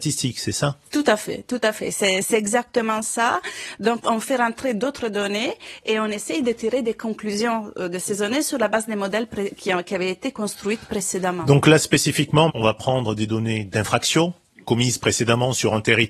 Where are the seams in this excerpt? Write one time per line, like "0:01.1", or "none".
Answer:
0:04.0
0:12.5
0:14.6